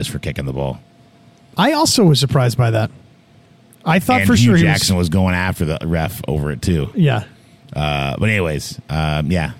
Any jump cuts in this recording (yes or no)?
no